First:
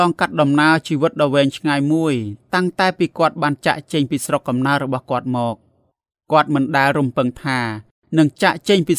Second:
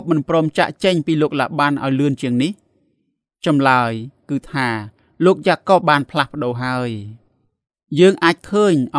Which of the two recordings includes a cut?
second; 1 cut; at 5.8 s

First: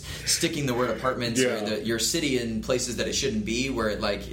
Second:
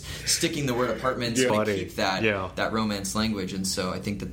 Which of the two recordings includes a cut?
second; 1 cut; at 1.5 s

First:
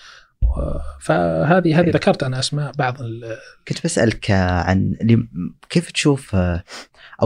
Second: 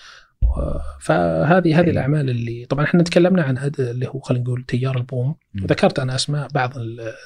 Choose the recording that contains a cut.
first; 1 cut; at 1.9 s

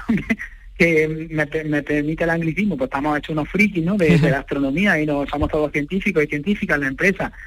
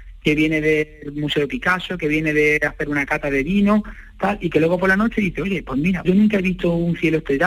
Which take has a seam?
second; 1 cut; at 6.1 s

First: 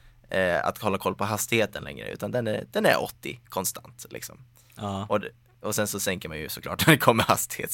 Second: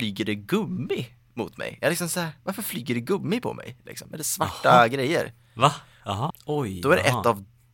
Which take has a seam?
second; 1 cut; at 6.3 s

